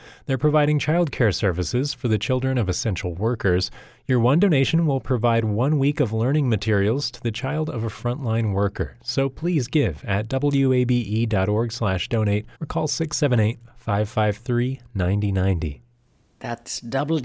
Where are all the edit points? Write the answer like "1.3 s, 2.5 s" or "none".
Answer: 12.5 s